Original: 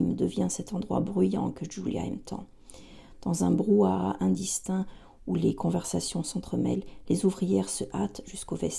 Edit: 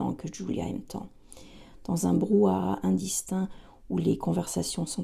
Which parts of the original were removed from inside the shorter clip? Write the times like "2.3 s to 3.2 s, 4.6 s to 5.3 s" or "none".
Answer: none